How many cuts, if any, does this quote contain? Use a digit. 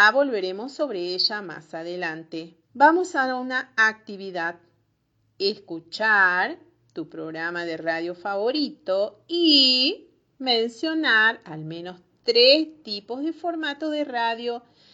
1